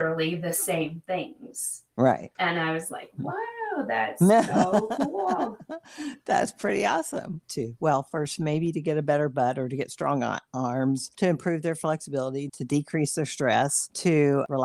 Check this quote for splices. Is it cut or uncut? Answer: cut